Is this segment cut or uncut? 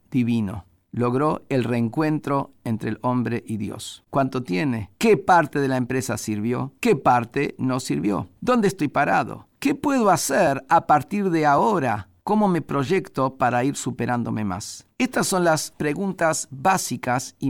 cut